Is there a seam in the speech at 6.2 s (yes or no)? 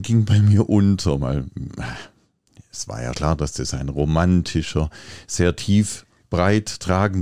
yes